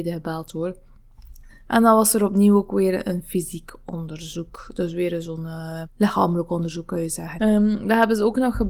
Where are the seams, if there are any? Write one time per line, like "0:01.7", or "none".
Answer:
0:01.5
0:05.8
0:07.4